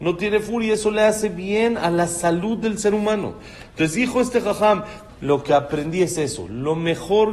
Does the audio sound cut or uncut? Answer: cut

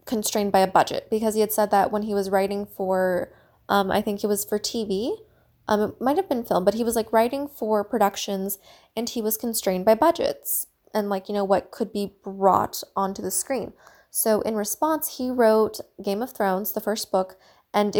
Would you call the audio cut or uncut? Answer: uncut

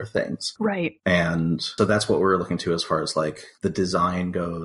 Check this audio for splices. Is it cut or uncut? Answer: cut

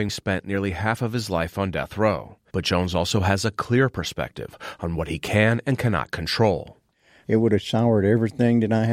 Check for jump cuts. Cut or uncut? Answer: cut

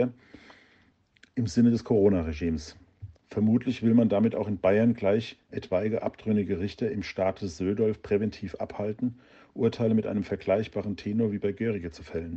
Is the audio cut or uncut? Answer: cut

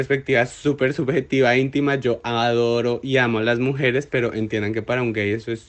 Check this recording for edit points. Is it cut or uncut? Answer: uncut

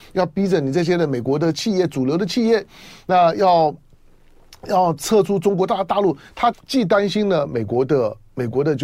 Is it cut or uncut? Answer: cut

